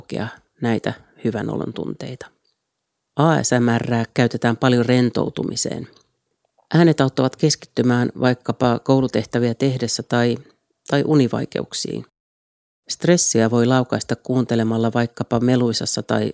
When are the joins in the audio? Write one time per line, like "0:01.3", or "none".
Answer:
none